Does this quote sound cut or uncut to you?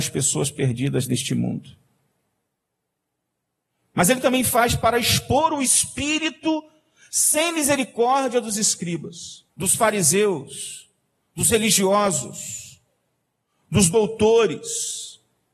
cut